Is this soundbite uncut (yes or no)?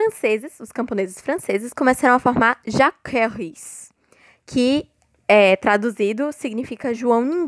yes